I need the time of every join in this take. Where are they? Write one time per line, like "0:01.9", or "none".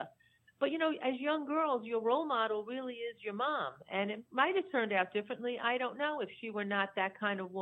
none

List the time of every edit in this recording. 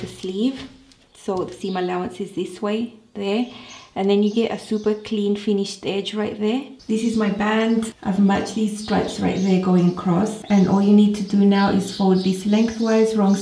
none

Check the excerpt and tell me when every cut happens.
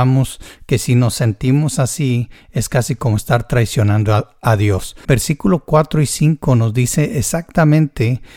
0:05.0

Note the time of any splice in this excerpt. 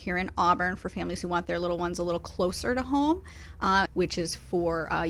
0:03.9

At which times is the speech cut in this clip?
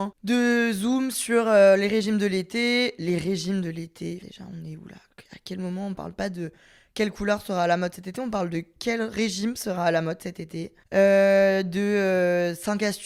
0:04.2

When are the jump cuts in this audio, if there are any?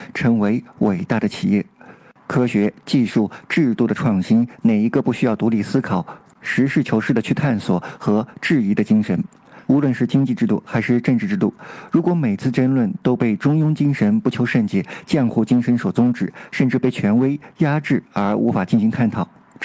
0:09.7

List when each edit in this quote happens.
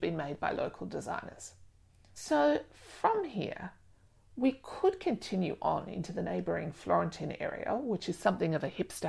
none

